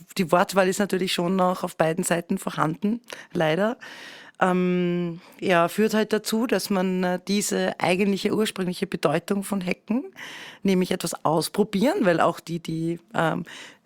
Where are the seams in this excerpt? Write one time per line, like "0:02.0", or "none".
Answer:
none